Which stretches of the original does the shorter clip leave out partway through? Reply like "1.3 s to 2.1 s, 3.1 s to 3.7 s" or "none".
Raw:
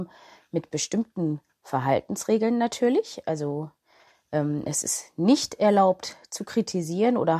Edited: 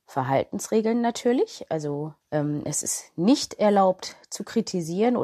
3.8 s to 4.2 s